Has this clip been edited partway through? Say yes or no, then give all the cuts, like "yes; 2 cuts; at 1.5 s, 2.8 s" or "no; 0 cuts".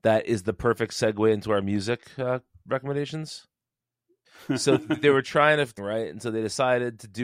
yes; 2 cuts; at 4.2 s, 5.8 s